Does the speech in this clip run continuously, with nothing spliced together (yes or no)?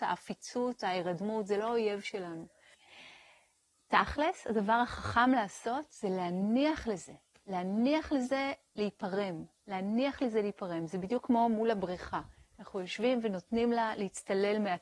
no